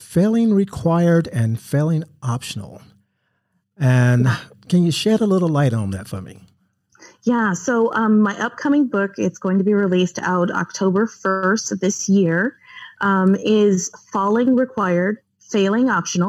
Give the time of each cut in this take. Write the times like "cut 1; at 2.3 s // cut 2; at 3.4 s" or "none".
none

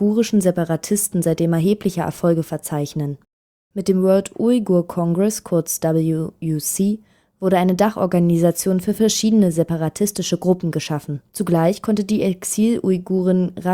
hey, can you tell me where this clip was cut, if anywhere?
cut 1; at 11.3 s

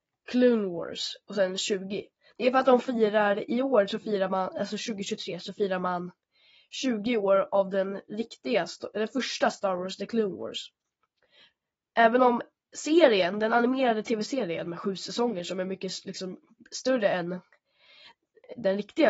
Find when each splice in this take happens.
none

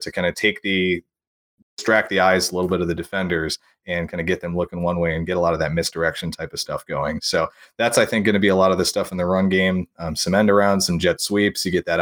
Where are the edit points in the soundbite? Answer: none

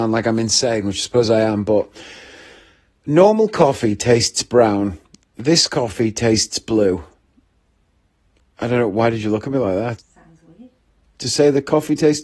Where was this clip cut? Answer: cut 1; at 10.0 s

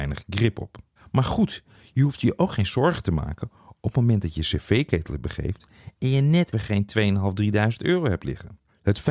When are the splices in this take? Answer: cut 1; at 6.5 s

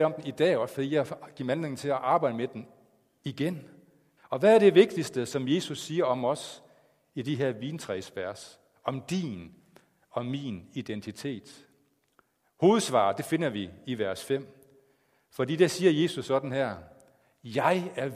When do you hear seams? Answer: cut 1; at 4.2 s

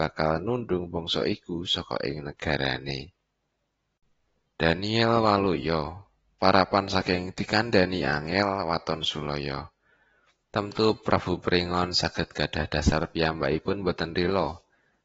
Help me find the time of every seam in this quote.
cut 1; at 10.4 s

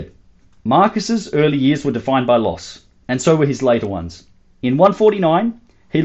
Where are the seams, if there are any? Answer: cut 1; at 4.5 s

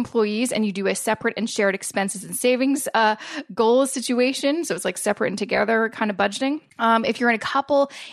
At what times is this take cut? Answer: cut 1; at 6.7 s

